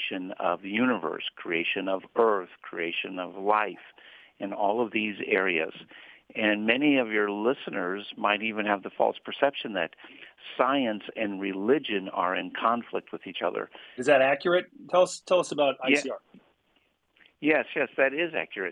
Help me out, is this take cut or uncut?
cut